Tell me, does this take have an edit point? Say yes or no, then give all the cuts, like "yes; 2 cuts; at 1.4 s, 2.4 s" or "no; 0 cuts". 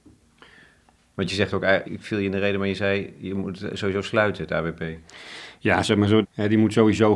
yes; 2 cuts; at 1.8 s, 6.2 s